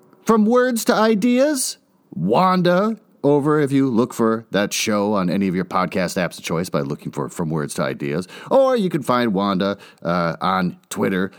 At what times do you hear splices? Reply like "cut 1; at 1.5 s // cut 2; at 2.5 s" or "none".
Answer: none